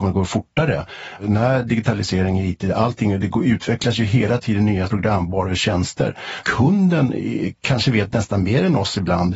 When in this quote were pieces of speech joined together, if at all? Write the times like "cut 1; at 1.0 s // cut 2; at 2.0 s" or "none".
none